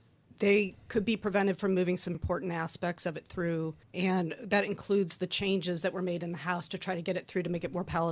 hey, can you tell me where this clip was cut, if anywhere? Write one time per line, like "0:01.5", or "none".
0:02.1
0:03.8